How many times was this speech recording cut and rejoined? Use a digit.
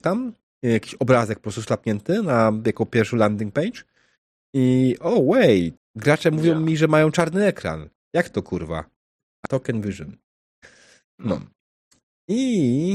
2